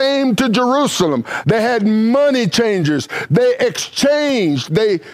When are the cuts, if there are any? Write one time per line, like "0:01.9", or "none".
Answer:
0:01.4